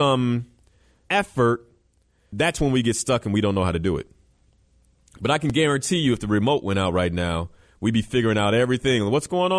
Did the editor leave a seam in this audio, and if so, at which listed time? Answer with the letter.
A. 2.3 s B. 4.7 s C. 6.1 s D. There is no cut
A